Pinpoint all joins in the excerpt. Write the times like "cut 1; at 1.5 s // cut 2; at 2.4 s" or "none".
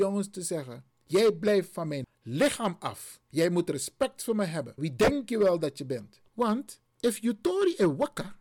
cut 1; at 4.8 s // cut 2; at 6.3 s